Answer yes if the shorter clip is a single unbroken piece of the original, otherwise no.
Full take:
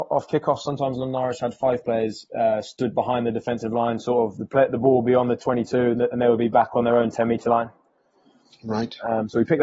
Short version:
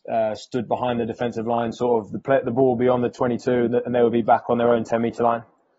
yes